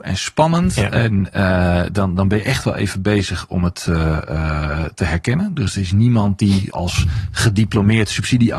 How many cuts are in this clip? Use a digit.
2